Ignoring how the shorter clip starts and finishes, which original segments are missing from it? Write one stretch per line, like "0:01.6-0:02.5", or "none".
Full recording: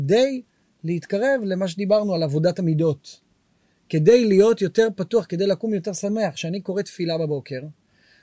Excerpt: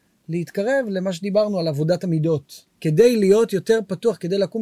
0:03.3-0:03.8